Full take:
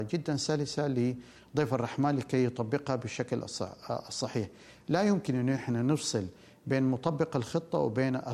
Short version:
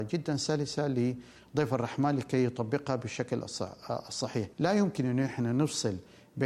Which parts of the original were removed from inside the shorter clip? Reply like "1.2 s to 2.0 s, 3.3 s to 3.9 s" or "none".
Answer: 4.5 s to 4.8 s